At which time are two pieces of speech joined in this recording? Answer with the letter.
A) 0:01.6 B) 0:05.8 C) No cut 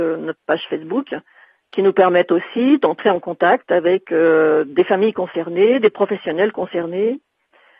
C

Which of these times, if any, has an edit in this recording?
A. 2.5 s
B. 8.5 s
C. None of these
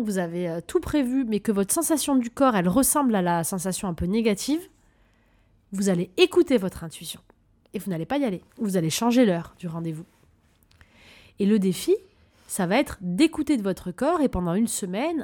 B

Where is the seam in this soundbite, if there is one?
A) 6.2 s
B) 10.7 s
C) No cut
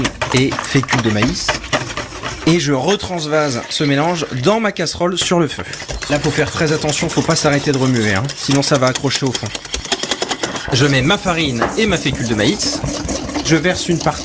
B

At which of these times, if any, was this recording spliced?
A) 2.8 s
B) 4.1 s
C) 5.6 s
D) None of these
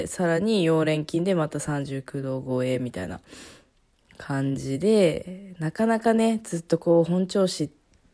D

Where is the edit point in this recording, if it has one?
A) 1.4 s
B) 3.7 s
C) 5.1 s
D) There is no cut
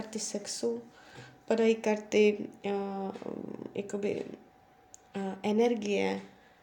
D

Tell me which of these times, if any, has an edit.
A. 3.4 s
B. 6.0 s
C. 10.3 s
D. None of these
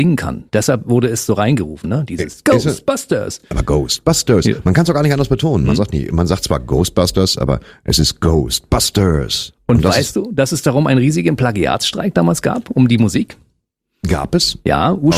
D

